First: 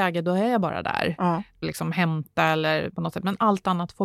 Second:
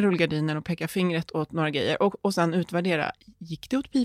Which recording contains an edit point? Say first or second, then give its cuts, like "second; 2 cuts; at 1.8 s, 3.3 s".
first; 2 cuts; at 1.6 s, 2.9 s